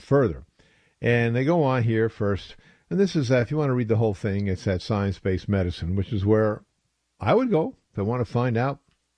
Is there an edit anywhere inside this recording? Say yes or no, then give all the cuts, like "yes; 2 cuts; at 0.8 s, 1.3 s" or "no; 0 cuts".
no; 0 cuts